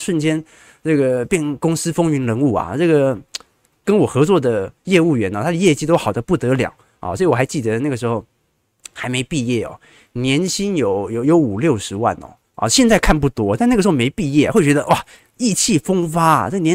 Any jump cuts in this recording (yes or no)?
no